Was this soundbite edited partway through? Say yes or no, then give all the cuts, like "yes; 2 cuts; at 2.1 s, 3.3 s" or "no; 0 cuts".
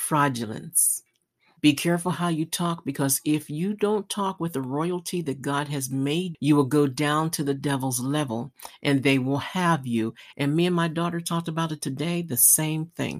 yes; 3 cuts; at 1.6 s, 6.3 s, 10.3 s